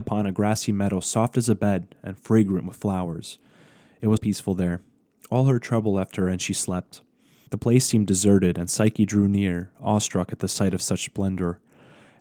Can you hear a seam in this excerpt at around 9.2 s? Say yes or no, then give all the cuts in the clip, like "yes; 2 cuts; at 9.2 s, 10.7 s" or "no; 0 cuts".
no; 2 cuts; at 4.2 s, 7.5 s